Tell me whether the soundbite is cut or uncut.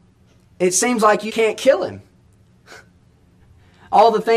cut